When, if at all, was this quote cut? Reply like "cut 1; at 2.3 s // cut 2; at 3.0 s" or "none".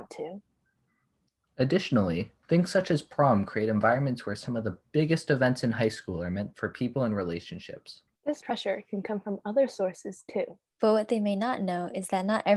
cut 1; at 8.2 s // cut 2; at 10.7 s